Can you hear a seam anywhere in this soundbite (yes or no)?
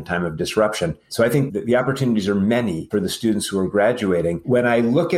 no